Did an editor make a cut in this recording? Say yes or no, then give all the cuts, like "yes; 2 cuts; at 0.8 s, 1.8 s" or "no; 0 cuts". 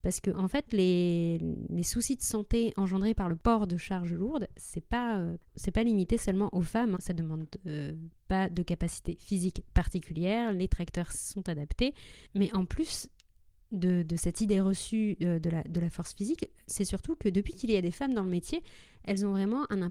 yes; 1 cut; at 7.0 s